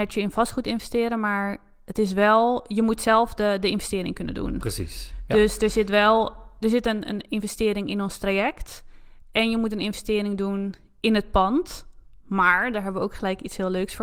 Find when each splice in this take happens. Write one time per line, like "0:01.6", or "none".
none

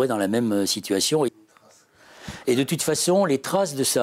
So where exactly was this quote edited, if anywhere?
0:01.3

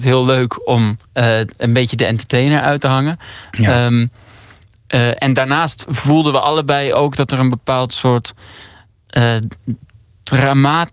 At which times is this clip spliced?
0:01.1

